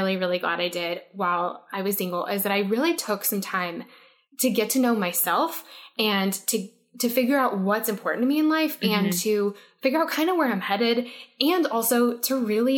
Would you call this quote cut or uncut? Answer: uncut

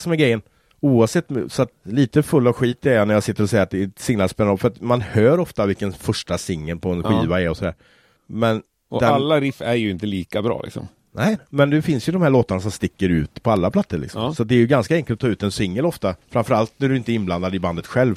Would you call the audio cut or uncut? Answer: cut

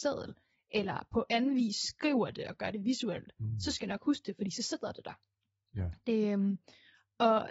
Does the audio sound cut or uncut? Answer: uncut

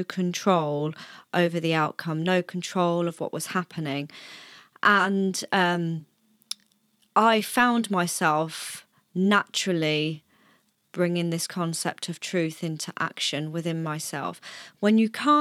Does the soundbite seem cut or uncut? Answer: uncut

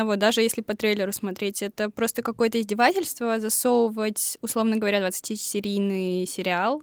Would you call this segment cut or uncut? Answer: uncut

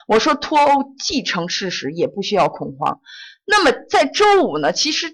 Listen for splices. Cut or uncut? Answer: uncut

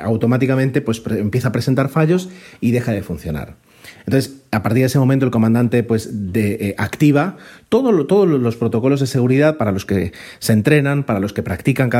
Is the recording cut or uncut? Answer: cut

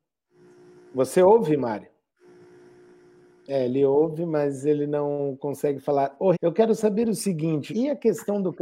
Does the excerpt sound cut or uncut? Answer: cut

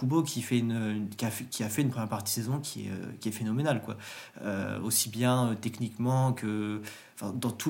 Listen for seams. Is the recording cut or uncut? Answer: uncut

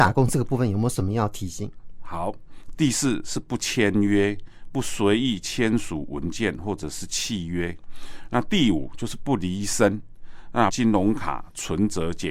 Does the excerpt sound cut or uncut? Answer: cut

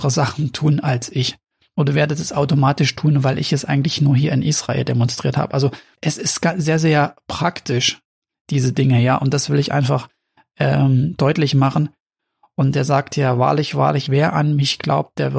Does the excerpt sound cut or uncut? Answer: cut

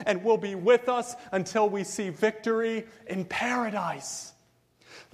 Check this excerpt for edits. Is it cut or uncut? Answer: uncut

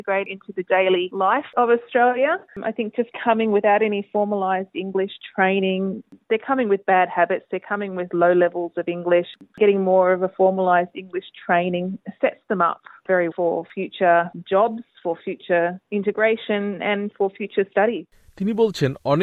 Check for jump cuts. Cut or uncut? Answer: cut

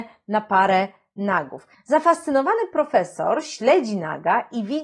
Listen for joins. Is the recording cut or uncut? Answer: cut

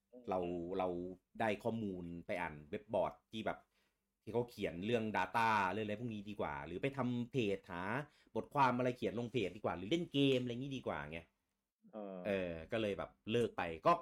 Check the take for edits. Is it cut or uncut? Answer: uncut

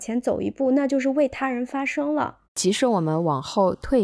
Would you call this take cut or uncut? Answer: cut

